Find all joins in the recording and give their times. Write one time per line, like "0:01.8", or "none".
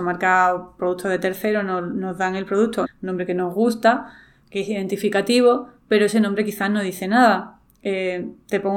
0:02.8

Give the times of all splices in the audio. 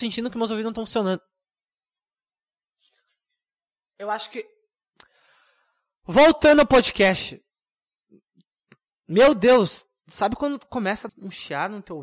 0:11.1

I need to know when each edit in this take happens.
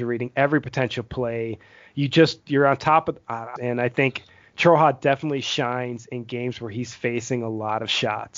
0:03.6

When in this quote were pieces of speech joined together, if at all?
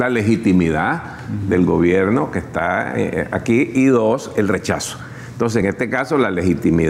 none

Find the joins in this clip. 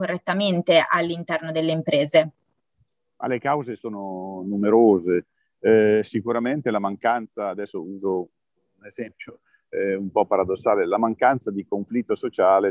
none

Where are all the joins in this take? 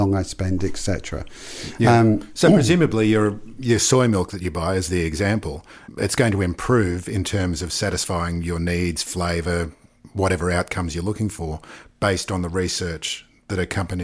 none

